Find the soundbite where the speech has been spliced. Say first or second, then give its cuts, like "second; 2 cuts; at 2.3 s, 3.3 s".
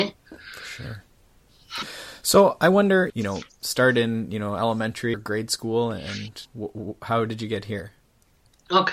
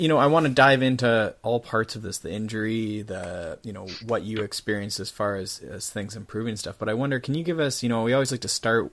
first; 3 cuts; at 3.1 s, 5.1 s, 6.4 s